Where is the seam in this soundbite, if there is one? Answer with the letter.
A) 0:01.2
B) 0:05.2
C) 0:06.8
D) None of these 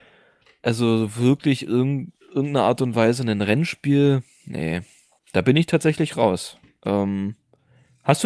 B